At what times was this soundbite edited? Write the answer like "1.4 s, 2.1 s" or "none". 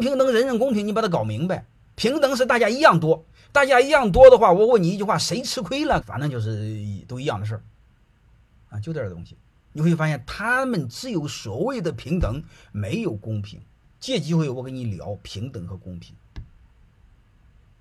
6.0 s